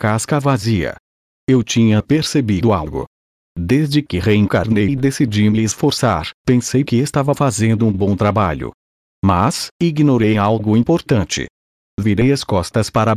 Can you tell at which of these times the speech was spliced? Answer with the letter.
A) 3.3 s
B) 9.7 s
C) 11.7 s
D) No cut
B